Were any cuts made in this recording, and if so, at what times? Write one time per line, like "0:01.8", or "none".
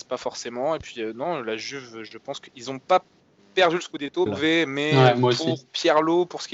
0:04.3